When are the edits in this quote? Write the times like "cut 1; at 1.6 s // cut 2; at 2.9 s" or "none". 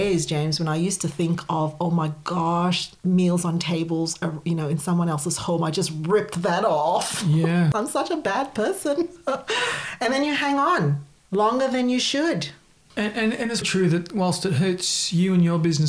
cut 1; at 13.6 s